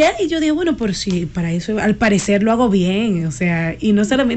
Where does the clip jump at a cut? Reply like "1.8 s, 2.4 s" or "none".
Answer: none